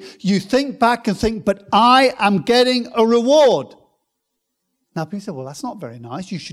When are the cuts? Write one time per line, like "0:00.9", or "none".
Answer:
none